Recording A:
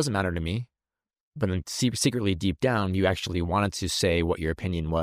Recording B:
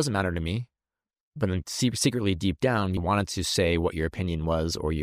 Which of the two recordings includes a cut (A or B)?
B